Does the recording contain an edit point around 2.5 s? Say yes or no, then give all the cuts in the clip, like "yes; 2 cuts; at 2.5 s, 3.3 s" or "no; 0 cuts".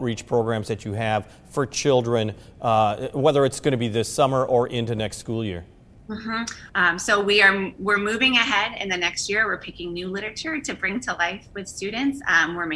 no; 1 cut; at 6.7 s